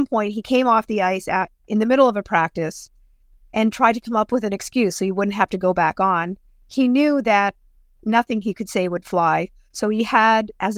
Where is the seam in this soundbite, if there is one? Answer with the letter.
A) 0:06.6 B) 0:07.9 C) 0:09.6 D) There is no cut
D